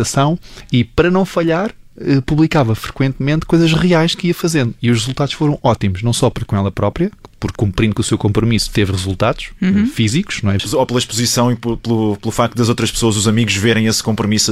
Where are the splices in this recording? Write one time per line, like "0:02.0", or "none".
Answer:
0:07.6
0:10.6